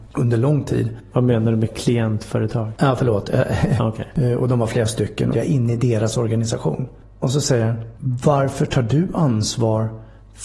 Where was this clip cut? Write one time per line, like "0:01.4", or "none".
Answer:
0:03.8
0:05.3